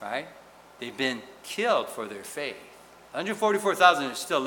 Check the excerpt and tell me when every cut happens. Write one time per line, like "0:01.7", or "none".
none